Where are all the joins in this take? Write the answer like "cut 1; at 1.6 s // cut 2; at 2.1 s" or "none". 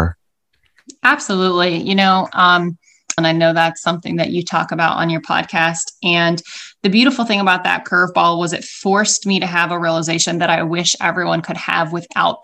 cut 1; at 3.2 s

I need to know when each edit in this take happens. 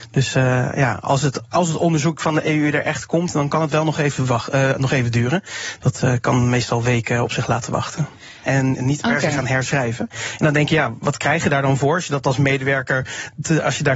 cut 1; at 8.4 s

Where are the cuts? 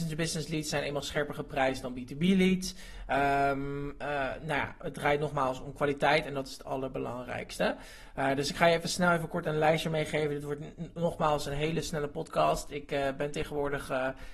none

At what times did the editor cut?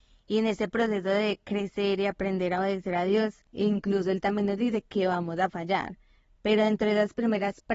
none

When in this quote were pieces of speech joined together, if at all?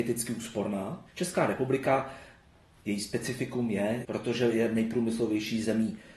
cut 1; at 1.1 s // cut 2; at 4.0 s

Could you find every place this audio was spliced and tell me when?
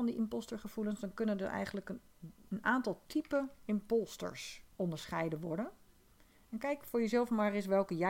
cut 1; at 4.7 s

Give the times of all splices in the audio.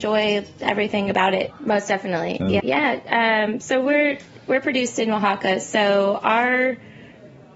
cut 1; at 1.5 s // cut 2; at 2.6 s

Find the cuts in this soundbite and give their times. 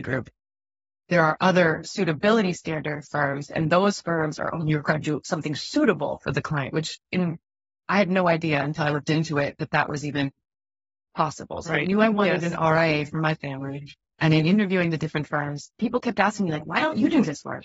none

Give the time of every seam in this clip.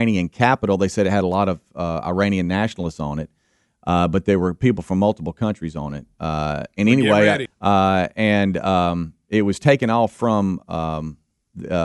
cut 1; at 7.5 s

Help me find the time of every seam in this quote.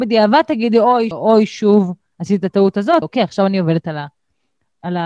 cut 1; at 1.1 s // cut 2; at 3.0 s

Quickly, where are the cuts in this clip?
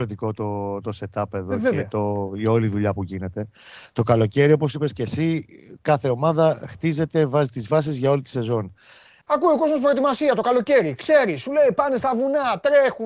cut 1; at 9.2 s

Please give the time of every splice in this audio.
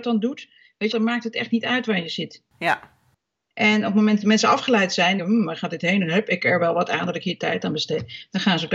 cut 1; at 0.9 s // cut 2; at 5.2 s

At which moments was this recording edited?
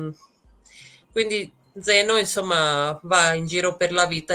cut 1; at 1.1 s

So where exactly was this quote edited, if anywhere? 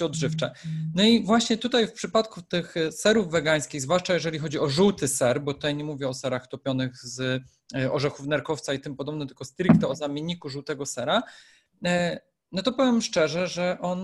none

